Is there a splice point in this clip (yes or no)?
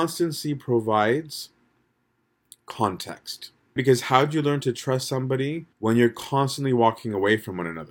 yes